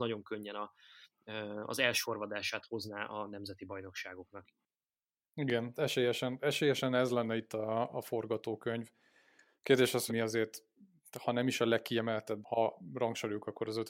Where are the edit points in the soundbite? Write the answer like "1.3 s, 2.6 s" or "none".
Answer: 10.1 s, 12.4 s